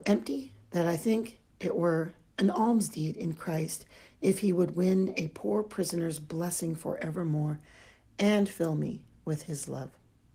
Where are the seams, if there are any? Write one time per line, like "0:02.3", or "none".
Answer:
none